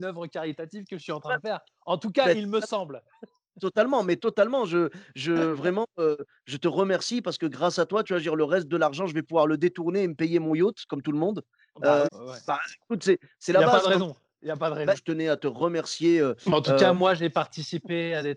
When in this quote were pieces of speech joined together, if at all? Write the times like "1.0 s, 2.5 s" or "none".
12.0 s, 14.9 s